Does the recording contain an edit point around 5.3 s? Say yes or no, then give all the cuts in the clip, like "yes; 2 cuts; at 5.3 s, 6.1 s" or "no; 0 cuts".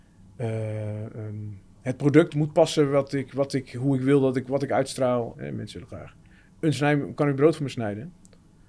yes; 2 cuts; at 2.3 s, 5.3 s